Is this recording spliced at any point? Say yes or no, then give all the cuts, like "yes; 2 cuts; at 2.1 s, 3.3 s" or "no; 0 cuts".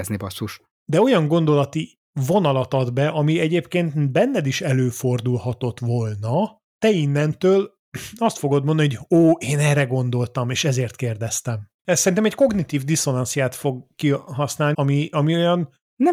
yes; 2 cuts; at 11.8 s, 14.7 s